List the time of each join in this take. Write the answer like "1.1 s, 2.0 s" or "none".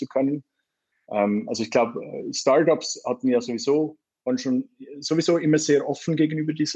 0.9 s